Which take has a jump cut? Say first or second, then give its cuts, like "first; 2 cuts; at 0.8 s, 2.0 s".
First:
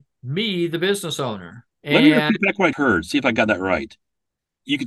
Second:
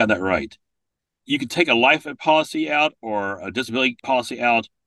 first; 1 cut; at 2.7 s